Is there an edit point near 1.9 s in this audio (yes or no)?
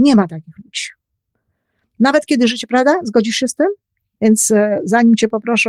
no